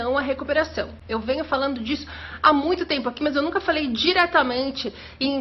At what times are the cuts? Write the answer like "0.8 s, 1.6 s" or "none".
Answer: none